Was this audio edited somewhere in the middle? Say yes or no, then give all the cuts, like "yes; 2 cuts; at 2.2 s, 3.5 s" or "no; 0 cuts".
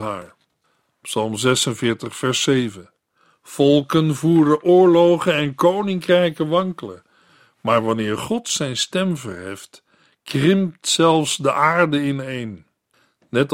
no; 0 cuts